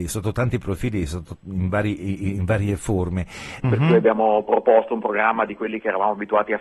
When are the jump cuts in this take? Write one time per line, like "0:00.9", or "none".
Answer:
0:03.6